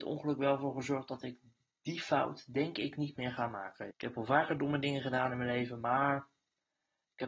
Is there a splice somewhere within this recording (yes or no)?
yes